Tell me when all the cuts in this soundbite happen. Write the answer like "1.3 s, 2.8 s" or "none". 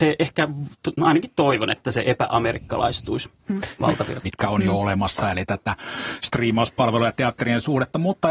4.2 s